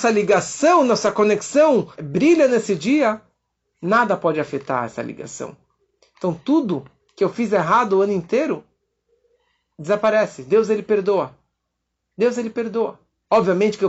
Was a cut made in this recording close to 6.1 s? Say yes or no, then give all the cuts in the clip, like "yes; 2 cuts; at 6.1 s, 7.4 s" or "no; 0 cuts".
no; 1 cut; at 2.0 s